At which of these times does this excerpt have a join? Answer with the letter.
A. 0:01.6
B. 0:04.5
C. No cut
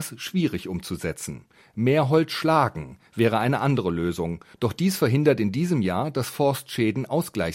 C